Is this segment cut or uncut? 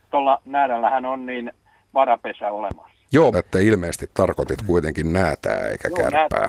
cut